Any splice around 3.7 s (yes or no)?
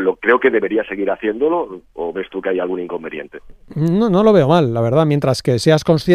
no